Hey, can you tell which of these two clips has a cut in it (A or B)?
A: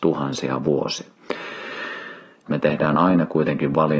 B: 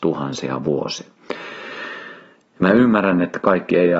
A